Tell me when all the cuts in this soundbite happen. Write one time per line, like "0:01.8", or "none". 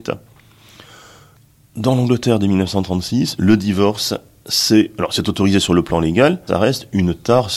0:06.5